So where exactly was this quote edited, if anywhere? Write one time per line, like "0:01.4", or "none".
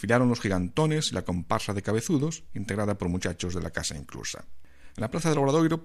0:04.9